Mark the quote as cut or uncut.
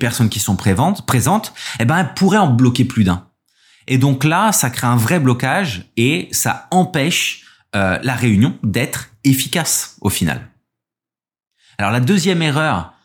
uncut